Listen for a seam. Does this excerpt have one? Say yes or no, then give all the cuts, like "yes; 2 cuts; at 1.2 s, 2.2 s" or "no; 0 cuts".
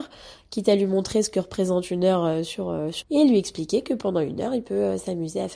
yes; 1 cut; at 3.0 s